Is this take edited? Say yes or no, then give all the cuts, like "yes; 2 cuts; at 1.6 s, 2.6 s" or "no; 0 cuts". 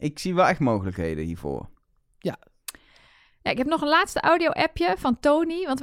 no; 0 cuts